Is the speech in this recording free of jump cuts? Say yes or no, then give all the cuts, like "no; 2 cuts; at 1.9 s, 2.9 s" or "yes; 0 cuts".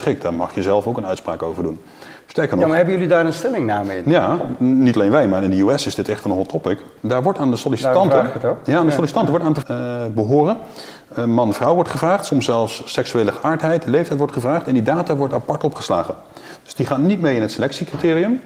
no; 1 cut; at 9.6 s